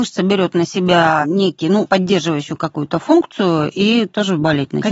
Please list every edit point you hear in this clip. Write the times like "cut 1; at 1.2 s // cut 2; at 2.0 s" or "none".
cut 1; at 1.8 s